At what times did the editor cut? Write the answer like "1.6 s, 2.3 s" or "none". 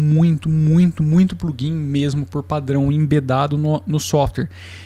none